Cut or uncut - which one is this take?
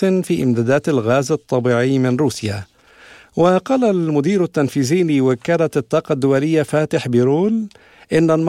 uncut